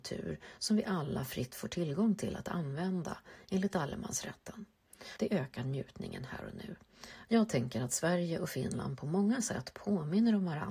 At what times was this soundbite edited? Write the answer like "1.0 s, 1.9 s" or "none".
5.2 s, 7.3 s